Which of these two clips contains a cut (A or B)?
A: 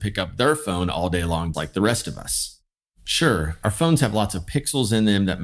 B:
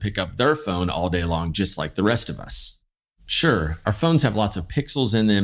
A